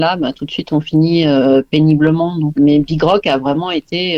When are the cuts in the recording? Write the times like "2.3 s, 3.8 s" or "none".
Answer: 2.6 s